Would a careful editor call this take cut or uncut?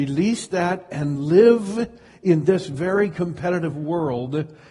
uncut